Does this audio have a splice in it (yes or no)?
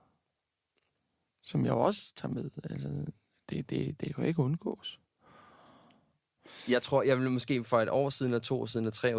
no